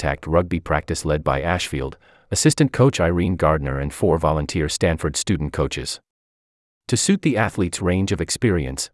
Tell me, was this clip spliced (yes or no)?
no